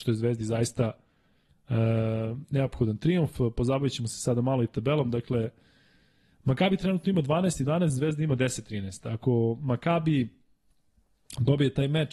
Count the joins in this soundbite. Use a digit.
0